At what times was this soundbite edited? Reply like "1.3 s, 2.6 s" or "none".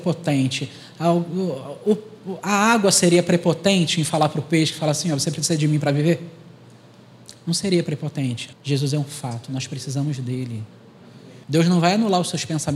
8.5 s, 11.4 s